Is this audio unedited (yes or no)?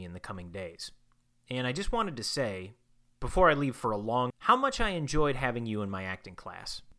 no